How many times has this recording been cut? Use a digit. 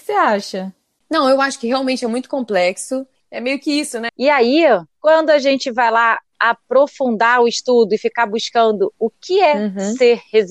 1